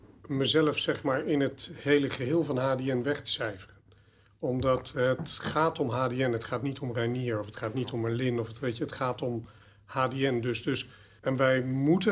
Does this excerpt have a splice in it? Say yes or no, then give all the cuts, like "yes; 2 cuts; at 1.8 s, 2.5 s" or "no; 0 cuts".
no; 0 cuts